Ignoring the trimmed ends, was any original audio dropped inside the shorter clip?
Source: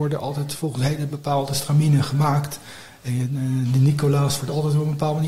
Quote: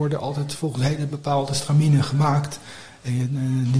no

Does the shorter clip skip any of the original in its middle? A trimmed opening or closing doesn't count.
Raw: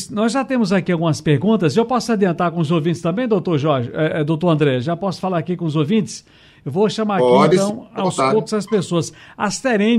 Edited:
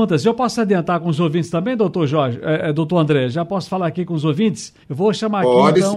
yes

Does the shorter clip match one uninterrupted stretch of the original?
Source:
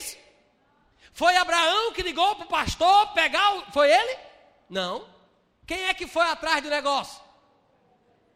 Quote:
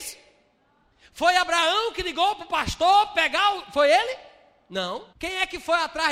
no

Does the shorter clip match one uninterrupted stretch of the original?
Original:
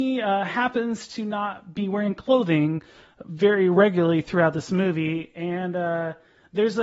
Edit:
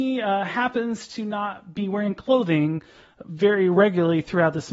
yes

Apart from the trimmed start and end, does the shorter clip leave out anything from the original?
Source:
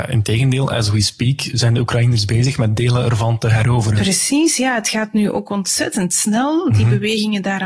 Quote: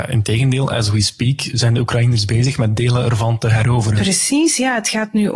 no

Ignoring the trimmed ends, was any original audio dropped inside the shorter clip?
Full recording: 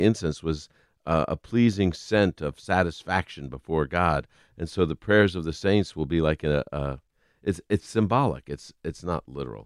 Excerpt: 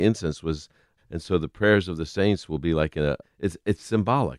yes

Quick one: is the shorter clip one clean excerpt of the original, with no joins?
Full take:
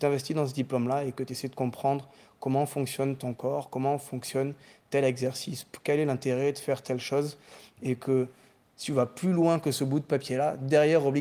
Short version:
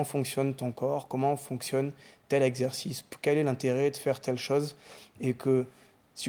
yes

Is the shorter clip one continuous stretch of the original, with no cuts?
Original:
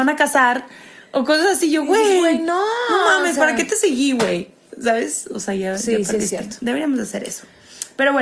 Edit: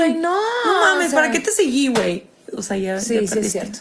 no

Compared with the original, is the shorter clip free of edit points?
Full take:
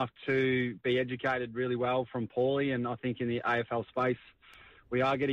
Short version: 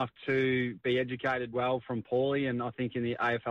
no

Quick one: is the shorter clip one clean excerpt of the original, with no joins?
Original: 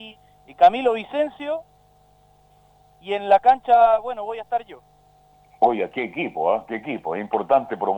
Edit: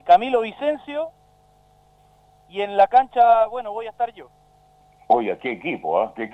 yes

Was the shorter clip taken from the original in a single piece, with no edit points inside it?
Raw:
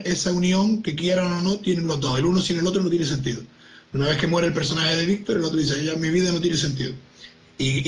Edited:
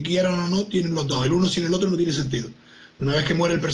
yes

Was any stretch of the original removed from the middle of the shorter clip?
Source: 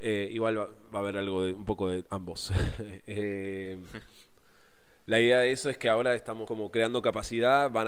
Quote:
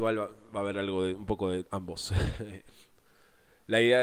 yes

